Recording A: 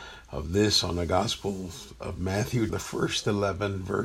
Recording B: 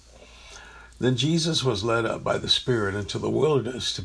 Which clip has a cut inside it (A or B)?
A